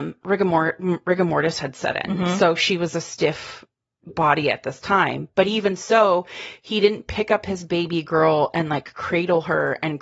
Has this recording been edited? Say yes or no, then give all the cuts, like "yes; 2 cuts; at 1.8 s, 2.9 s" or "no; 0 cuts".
no; 0 cuts